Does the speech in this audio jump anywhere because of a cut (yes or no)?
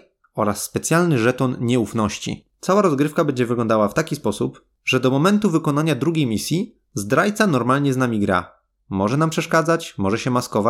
yes